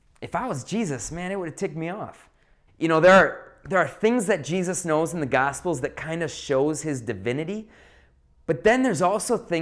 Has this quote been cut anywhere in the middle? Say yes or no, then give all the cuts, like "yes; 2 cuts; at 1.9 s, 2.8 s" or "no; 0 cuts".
yes; 1 cut; at 2.7 s